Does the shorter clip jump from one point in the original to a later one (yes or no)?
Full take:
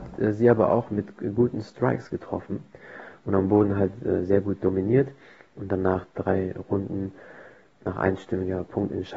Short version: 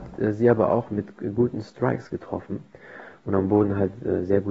no